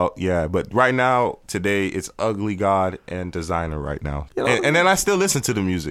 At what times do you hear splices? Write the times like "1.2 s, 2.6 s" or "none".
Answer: 4.3 s